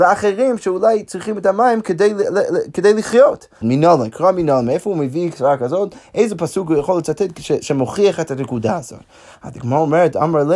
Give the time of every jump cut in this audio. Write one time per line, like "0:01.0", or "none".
0:03.6